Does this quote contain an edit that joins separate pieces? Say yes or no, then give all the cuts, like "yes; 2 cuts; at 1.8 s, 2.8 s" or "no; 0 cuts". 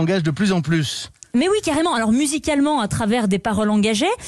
no; 0 cuts